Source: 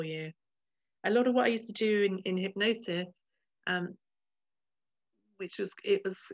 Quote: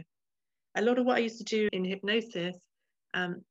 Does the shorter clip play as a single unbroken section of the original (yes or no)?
no